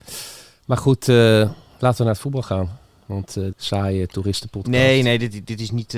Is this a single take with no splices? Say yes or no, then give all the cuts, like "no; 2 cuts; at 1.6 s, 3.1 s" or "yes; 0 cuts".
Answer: no; 1 cut; at 3.5 s